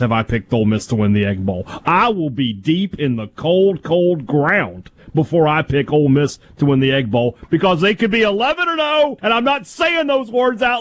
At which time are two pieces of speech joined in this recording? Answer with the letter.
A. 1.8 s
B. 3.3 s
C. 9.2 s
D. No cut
C